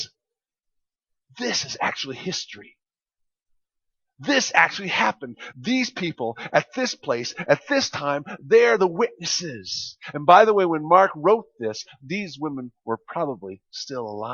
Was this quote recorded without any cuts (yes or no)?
yes